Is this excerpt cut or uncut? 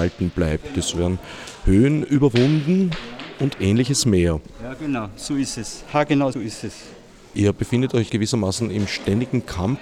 cut